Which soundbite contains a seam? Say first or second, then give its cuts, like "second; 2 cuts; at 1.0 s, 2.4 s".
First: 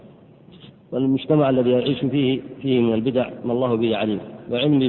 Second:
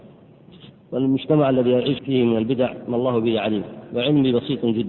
second; 1 cut; at 2.0 s